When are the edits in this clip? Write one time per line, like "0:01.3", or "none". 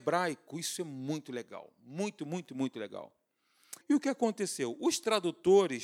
0:03.8